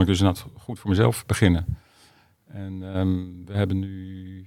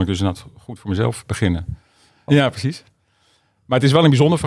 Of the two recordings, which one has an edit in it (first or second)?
second